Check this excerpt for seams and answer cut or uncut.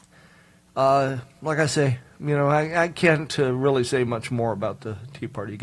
uncut